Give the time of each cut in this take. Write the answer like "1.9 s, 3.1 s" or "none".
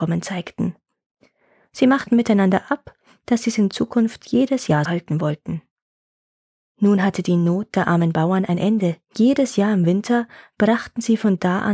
4.9 s, 9.0 s